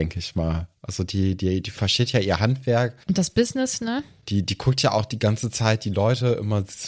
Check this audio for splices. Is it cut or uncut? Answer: uncut